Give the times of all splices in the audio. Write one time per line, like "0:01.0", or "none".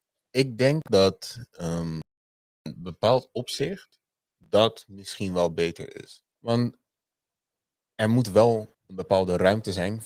0:06.3
0:08.7